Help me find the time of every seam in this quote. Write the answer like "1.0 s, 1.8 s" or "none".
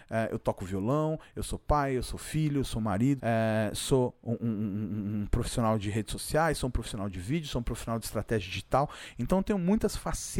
3.2 s